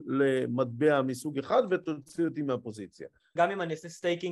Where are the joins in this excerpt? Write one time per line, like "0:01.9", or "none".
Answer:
0:03.4